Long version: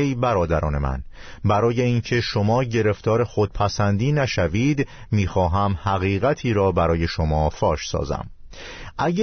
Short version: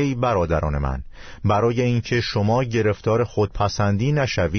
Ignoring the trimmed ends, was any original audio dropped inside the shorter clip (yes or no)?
no